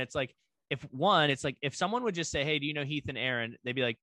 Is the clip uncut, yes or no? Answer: yes